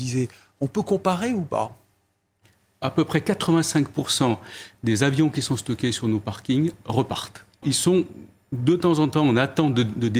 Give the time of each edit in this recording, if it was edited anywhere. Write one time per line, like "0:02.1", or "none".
0:07.6